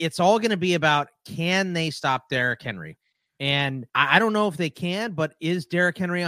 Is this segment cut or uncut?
cut